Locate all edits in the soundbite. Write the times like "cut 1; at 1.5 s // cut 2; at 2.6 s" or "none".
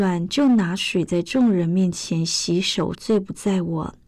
cut 1; at 2.9 s